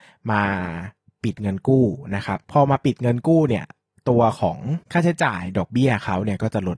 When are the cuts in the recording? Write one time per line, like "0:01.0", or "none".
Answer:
0:04.8